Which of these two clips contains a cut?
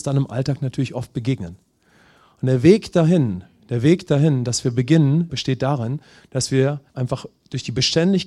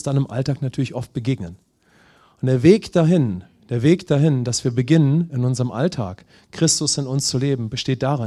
first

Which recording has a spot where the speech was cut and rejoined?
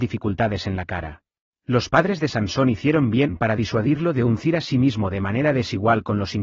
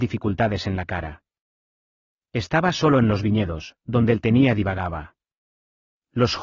first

